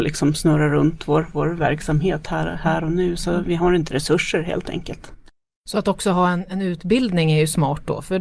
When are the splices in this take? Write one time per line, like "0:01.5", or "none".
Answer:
none